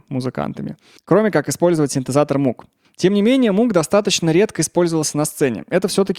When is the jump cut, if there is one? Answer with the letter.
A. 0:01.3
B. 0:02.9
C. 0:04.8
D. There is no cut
D